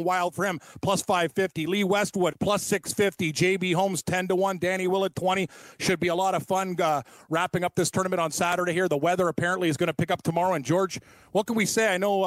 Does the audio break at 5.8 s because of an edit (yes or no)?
no